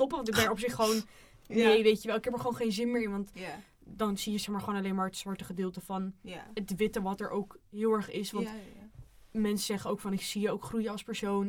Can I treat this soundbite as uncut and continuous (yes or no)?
yes